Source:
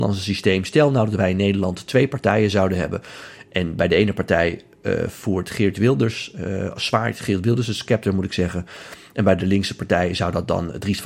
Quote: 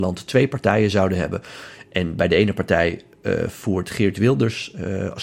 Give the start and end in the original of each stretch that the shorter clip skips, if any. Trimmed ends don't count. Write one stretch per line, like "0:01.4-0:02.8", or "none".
none